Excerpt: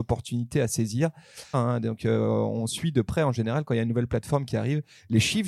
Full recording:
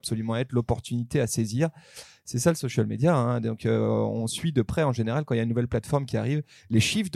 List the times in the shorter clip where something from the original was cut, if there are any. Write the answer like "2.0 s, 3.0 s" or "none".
1.5 s